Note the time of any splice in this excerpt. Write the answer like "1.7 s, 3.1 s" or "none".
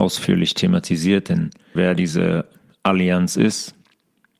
1.8 s